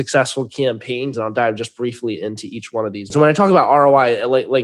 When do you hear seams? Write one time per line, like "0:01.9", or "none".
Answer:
0:01.1
0:03.1

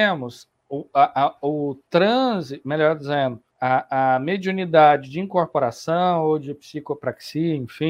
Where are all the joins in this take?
0:03.5

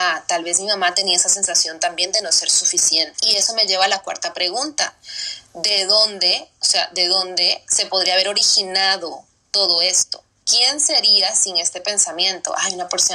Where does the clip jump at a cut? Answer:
0:03.1
0:10.4

